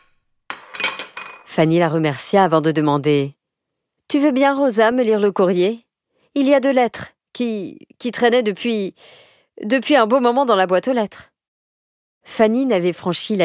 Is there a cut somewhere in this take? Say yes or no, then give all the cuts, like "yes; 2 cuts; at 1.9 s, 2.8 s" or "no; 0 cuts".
no; 0 cuts